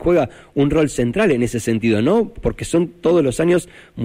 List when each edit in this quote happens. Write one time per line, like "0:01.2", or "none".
0:02.4